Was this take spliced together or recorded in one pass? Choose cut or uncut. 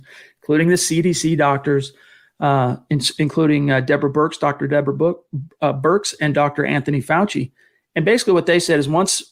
uncut